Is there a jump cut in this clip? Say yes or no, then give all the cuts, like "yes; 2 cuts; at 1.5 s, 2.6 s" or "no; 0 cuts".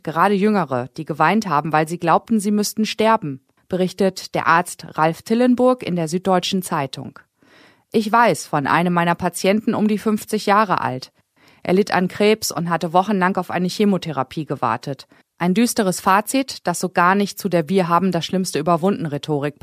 yes; 1 cut; at 15.2 s